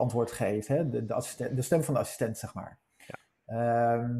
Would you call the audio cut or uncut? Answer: uncut